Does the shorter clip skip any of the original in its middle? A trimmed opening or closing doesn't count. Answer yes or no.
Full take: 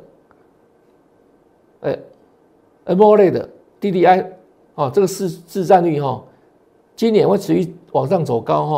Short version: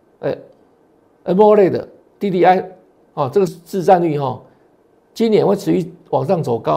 yes